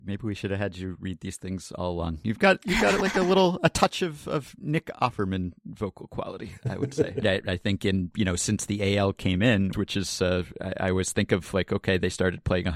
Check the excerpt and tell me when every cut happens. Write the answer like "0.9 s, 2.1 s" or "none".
7.2 s, 9.7 s